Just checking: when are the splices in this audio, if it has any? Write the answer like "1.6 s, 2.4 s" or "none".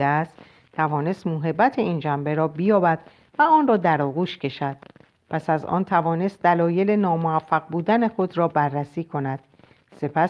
none

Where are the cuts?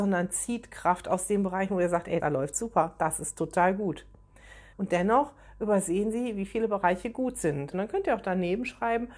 2.2 s, 4.7 s, 7.7 s

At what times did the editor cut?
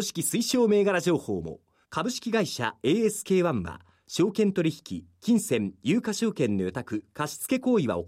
1.8 s

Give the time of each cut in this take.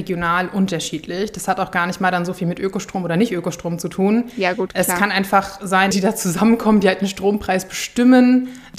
5.9 s

